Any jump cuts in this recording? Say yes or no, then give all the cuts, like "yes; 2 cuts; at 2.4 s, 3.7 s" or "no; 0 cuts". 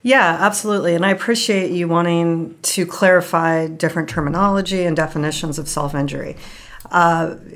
no; 0 cuts